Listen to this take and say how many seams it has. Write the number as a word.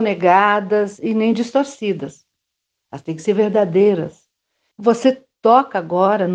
one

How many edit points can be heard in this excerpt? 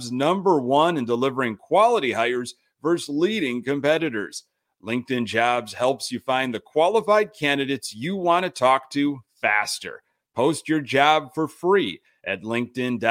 zero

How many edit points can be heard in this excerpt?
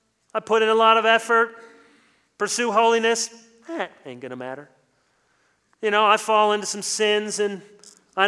zero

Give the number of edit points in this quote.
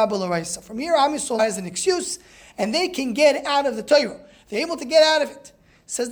one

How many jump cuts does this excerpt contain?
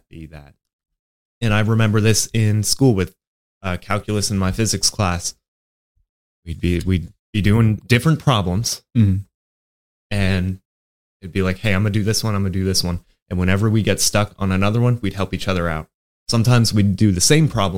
zero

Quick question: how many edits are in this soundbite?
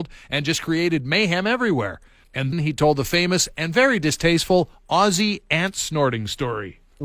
one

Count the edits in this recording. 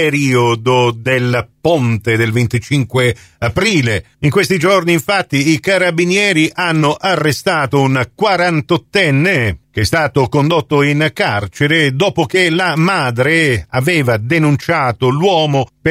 zero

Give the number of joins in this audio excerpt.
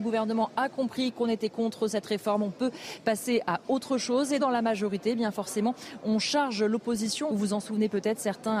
two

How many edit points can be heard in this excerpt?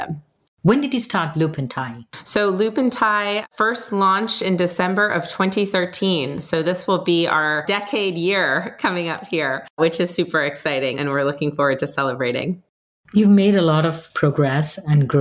zero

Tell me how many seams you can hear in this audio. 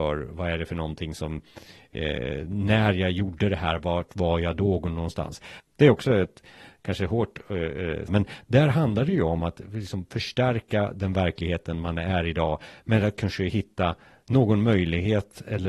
two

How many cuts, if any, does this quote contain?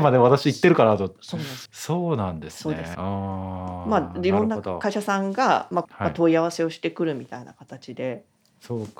three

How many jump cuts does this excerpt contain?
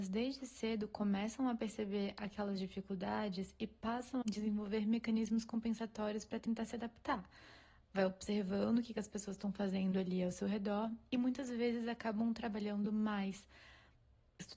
one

